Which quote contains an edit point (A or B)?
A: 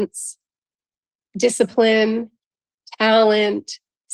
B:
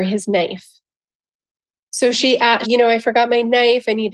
B